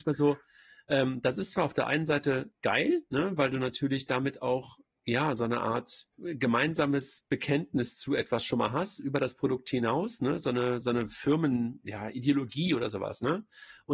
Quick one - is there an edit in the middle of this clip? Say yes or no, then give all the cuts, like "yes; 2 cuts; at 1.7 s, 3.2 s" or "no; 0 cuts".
yes; 2 cuts; at 6.1 s, 10.8 s